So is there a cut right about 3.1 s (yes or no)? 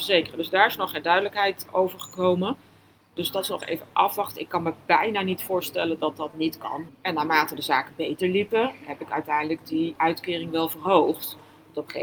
no